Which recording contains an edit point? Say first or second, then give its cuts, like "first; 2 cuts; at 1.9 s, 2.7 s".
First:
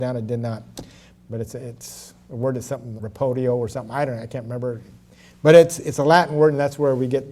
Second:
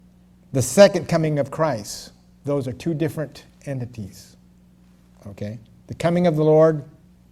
first; 1 cut; at 3.0 s